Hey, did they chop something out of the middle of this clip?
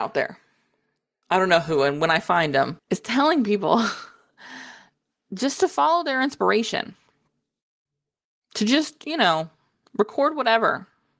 yes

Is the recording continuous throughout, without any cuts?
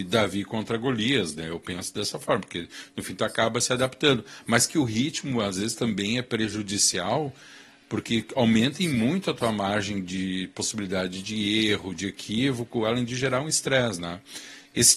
yes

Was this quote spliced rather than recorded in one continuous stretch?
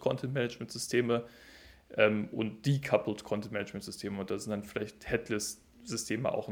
no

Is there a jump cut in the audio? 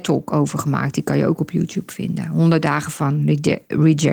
no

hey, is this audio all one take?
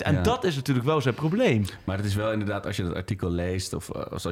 yes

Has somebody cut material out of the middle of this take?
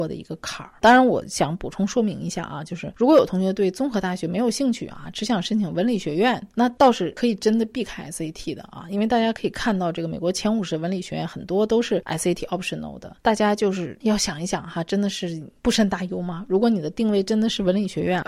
yes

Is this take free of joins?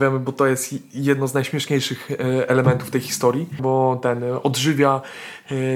no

